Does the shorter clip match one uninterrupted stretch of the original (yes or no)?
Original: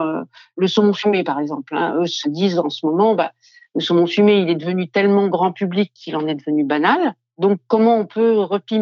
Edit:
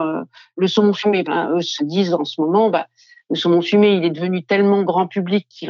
no